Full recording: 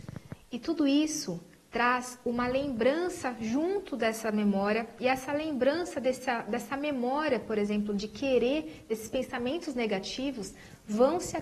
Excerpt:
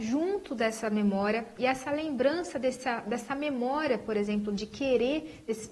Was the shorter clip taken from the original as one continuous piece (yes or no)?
yes